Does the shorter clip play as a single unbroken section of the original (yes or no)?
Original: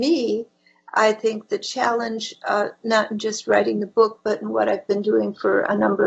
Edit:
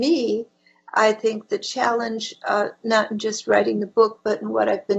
yes